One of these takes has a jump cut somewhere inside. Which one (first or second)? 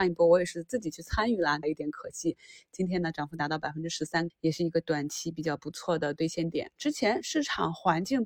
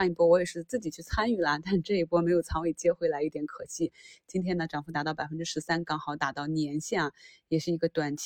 first